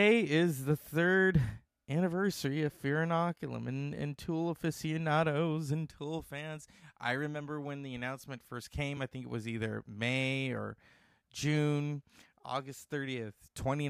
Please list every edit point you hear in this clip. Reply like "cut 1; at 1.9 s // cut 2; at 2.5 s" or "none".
none